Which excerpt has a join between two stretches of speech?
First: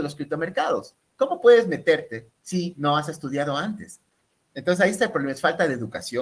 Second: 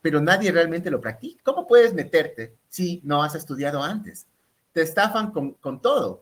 second; 2 cuts; at 1.4 s, 4.6 s

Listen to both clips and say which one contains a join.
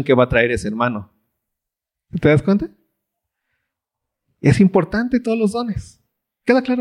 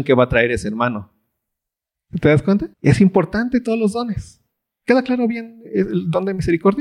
second; 1 cut; at 2.7 s

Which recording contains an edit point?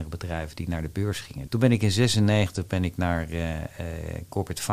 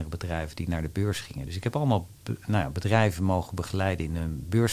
first; 1 cut; at 1.5 s

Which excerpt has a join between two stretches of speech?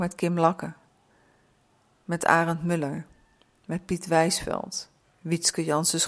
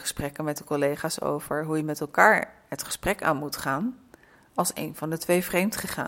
first; 1 cut; at 5.0 s

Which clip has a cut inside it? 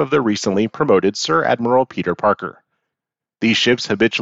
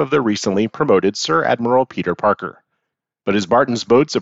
second; 1 cut; at 3.2 s

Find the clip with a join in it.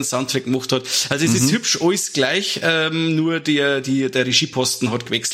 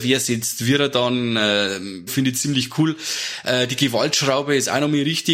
second; 1 cut; at 2.1 s

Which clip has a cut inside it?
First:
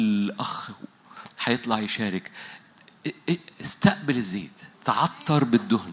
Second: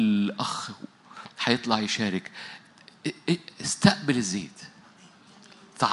first; 1 cut; at 4.7 s

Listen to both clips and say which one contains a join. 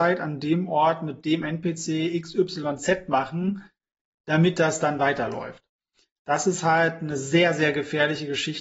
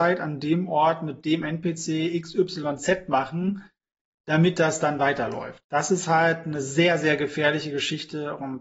second; 1 cut; at 5.6 s

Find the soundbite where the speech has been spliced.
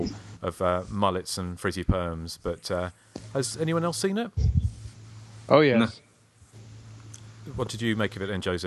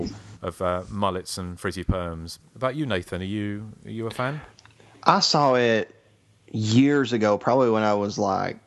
second; 1 cut; at 2.4 s

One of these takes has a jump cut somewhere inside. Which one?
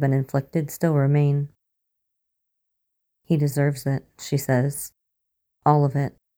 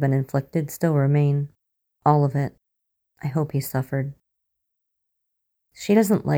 second; 1 cut; at 2.0 s

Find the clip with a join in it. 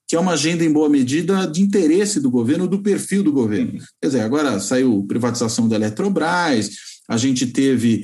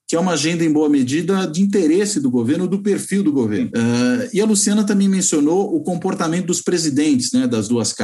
second; 1 cut; at 3.7 s

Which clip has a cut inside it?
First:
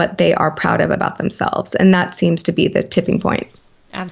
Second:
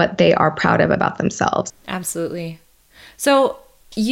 second; 1 cut; at 1.7 s

